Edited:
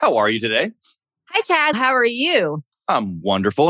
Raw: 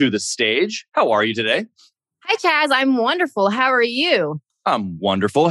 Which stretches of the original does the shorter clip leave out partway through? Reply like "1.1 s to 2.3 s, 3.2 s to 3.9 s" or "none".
2.7 s to 3.5 s